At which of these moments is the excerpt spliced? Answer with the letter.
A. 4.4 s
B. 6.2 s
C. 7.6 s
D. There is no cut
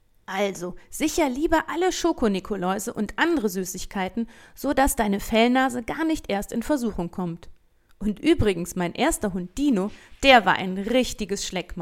D